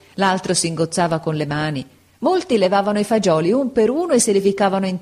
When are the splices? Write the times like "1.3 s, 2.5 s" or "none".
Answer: none

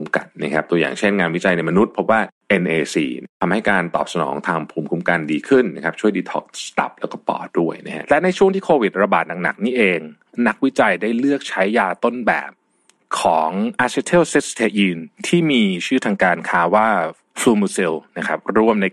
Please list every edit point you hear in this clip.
7.5 s

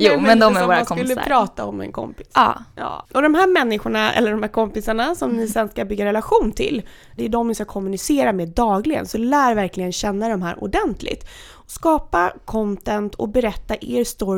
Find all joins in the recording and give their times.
7.2 s

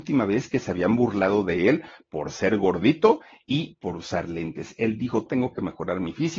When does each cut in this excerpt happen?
5.3 s

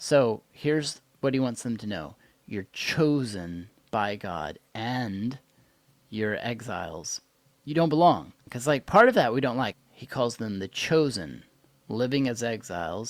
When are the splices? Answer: 8.5 s, 9.7 s

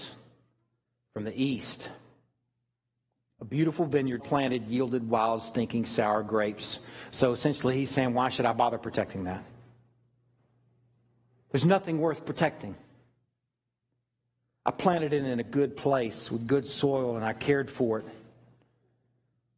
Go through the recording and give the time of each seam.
4.2 s

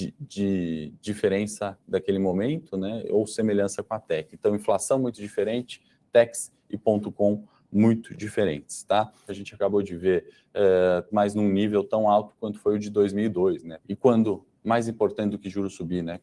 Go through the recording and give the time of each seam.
9.3 s, 11.1 s, 13.8 s

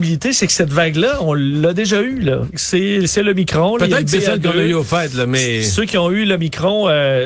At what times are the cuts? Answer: 2.5 s

